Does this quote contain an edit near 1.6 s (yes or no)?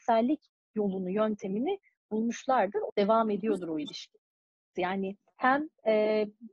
no